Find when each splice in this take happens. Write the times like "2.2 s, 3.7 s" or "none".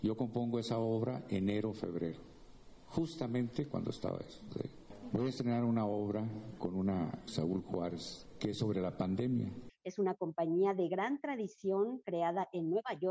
7.3 s, 9.7 s